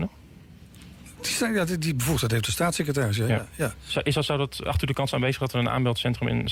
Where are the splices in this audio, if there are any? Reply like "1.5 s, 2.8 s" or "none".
none